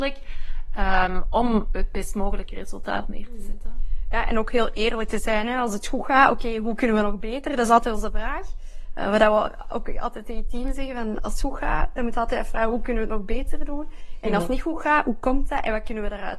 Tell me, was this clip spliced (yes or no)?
no